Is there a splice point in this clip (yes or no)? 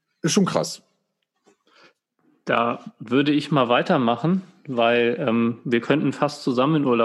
no